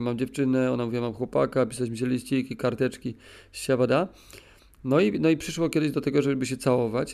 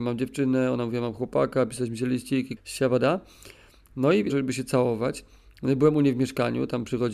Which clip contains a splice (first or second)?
second